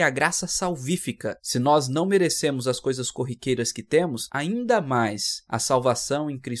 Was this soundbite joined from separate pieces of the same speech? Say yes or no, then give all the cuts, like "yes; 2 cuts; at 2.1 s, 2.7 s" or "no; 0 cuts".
no; 0 cuts